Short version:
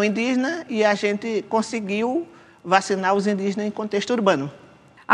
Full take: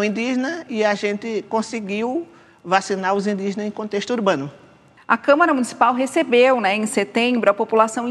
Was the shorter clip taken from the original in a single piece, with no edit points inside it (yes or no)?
yes